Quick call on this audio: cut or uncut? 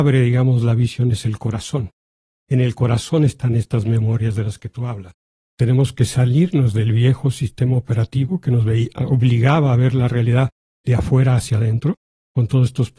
cut